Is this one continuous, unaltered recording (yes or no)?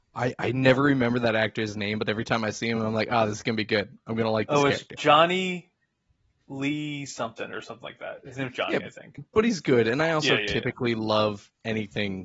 yes